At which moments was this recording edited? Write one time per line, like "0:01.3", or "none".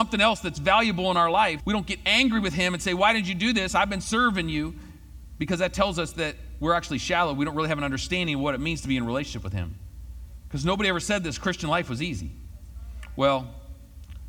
0:01.6